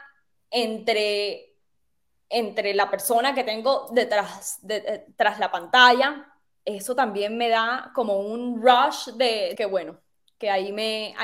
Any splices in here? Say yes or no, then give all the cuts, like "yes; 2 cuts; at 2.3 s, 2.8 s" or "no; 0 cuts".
yes; 1 cut; at 9.6 s